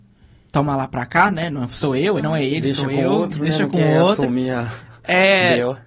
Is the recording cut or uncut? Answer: cut